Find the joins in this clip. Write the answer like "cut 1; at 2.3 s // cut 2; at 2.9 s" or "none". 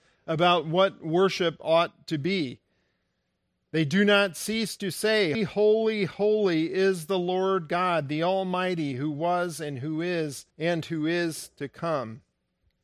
cut 1; at 5.3 s // cut 2; at 10.5 s